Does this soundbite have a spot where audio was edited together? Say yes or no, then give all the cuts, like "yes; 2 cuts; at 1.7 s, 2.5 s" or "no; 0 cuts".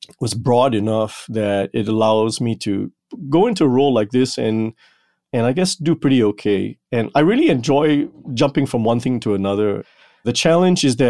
no; 0 cuts